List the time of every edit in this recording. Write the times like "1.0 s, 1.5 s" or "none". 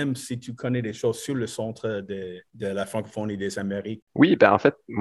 2.5 s, 4.0 s

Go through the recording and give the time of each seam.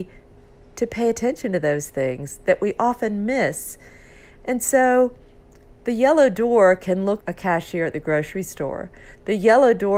7.2 s

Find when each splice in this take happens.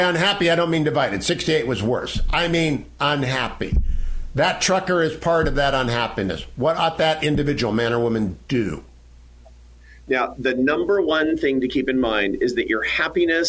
none

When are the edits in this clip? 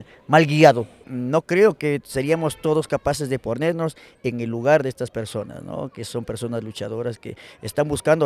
none

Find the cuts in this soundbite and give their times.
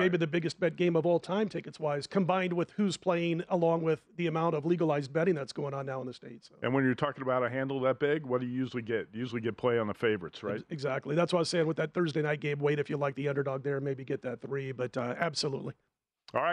none

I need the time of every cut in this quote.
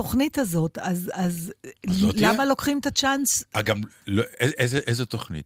none

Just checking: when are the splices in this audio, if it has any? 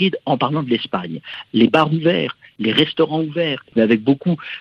1.5 s

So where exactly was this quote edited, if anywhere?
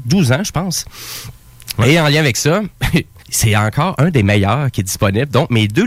3.2 s

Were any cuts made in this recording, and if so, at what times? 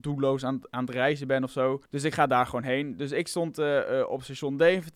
1.9 s

